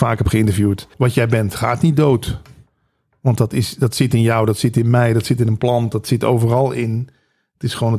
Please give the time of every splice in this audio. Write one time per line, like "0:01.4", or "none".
0:00.9